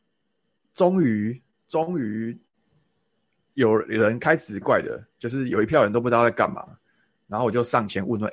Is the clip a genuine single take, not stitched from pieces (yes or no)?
no